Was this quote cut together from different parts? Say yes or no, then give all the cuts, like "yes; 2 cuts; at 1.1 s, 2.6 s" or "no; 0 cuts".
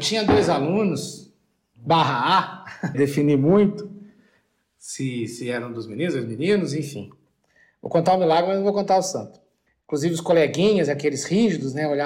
yes; 2 cuts; at 2.9 s, 9.8 s